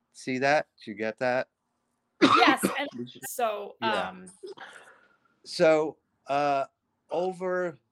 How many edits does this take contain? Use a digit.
1